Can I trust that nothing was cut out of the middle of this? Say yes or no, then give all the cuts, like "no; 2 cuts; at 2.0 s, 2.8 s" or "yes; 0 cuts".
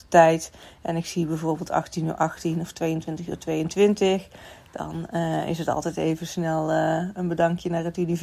yes; 0 cuts